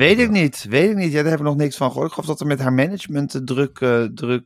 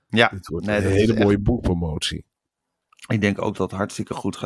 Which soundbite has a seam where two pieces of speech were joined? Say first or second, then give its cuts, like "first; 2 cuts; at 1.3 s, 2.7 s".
second; 1 cut; at 3.5 s